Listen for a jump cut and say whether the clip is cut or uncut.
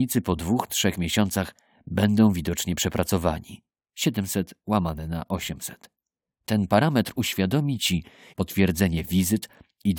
cut